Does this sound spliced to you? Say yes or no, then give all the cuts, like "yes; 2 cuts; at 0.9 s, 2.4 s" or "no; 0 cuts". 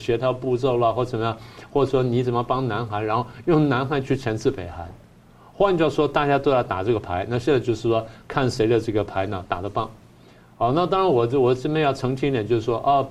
no; 0 cuts